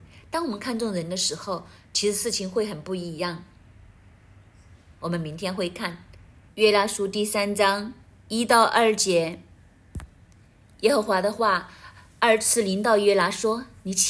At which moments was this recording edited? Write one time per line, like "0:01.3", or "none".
0:05.0
0:06.5